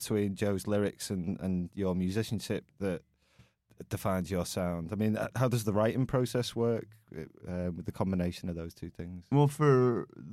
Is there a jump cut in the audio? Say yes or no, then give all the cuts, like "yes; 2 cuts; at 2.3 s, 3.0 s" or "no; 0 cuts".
yes; 1 cut; at 5.3 s